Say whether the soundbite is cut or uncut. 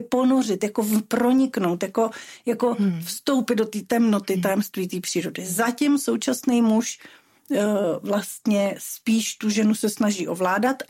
uncut